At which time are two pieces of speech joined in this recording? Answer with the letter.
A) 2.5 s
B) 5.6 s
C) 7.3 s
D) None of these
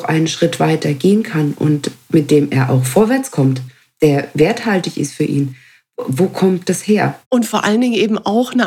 C